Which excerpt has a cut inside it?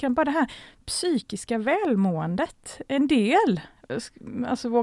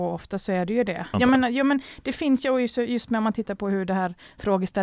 second; 1 cut; at 1.1 s

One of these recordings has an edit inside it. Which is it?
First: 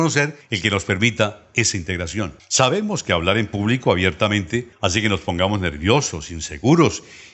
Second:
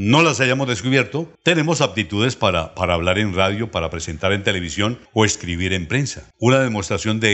second; 1 cut; at 6.3 s

